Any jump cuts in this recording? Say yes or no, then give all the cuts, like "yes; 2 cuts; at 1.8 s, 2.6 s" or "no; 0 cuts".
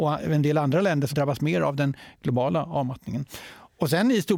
yes; 1 cut; at 1.1 s